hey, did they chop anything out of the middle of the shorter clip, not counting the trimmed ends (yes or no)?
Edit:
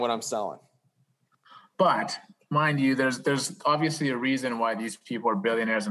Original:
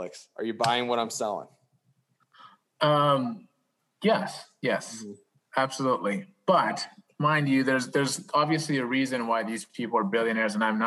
yes